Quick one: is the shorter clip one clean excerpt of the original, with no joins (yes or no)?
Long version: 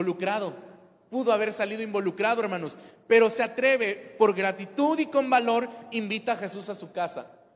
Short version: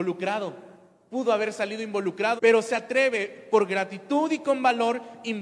no